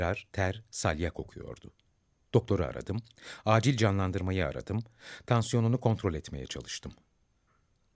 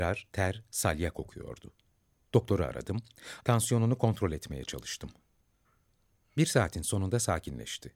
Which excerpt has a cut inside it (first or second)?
second